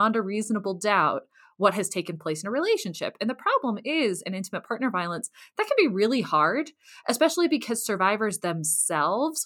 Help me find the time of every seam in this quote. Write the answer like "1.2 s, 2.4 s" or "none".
none